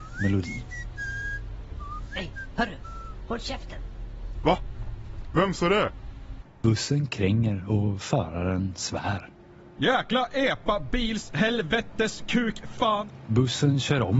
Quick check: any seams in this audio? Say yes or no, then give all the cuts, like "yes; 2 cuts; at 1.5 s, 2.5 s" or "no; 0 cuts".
yes; 2 cuts; at 4.4 s, 6.4 s